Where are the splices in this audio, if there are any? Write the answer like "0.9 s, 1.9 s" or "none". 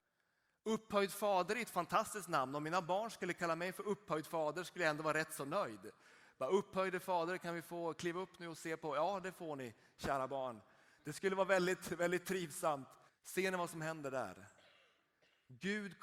13.1 s